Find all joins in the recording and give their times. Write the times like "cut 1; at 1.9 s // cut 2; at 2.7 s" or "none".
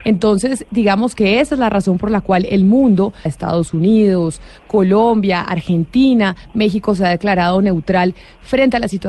cut 1; at 3.3 s